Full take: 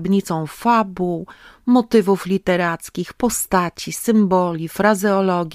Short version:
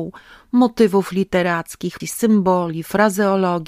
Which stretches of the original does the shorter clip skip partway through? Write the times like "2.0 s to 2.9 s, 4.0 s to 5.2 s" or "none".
3.1 s to 3.9 s